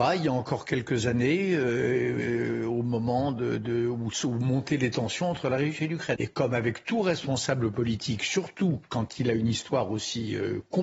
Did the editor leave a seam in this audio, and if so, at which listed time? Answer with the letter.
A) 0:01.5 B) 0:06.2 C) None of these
B